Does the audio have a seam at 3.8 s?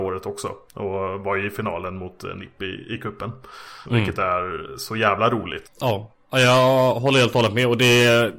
yes; 2 cuts; at 3.8 s, 5.6 s

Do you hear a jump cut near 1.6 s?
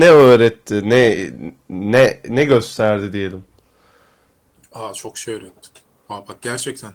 no; 0 cuts

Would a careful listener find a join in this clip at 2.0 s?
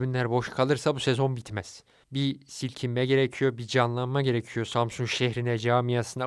yes; 1 cut; at 2.0 s

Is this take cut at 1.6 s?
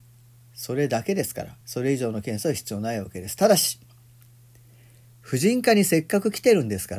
yes; 1 cut; at 1.6 s

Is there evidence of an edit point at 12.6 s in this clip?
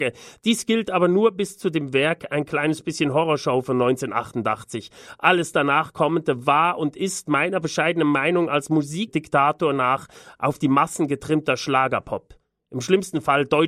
no; 0 cuts

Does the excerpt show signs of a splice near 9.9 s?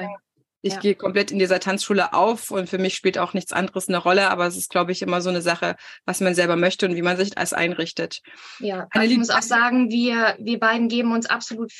no; 0 cuts

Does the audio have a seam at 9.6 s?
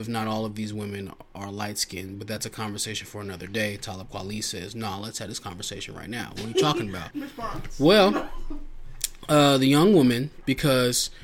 no; 1 cut; at 7.1 s

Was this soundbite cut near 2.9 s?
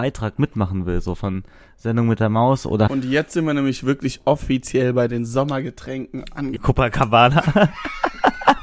yes; 2 cuts; at 2.9 s, 6.6 s

